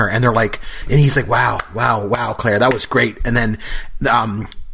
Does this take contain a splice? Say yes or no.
no